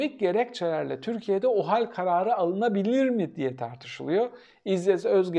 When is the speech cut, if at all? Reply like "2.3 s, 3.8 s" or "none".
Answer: none